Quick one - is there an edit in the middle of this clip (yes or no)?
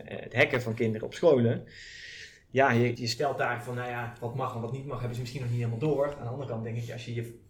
yes